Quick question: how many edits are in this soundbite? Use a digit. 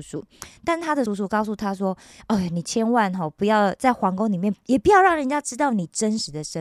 2